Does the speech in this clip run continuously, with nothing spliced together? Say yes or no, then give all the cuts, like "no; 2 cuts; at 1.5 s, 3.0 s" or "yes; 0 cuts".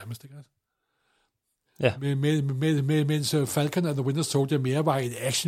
yes; 0 cuts